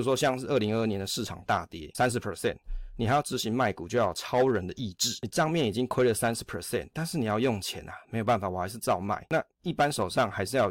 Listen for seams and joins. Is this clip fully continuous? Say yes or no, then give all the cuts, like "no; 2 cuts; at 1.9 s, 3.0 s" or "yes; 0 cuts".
yes; 0 cuts